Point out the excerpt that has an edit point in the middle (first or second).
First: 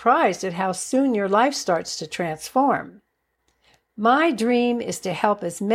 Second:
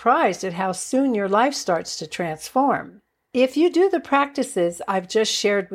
second